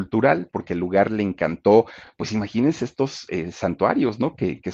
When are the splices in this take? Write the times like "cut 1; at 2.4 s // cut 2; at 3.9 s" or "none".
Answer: none